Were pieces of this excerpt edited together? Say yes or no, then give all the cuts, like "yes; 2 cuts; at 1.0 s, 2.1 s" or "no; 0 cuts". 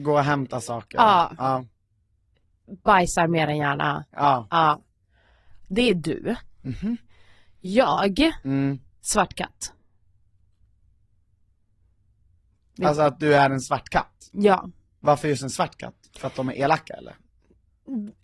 no; 0 cuts